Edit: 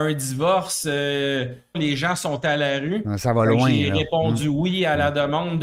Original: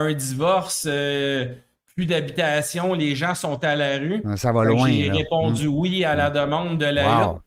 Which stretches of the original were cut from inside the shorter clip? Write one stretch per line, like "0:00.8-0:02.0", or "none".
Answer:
0:01.7-0:02.9